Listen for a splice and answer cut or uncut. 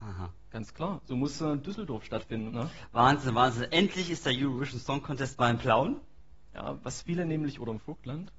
cut